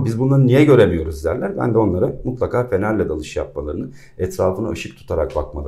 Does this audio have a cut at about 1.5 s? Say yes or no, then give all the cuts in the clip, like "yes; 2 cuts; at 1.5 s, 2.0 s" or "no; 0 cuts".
no; 0 cuts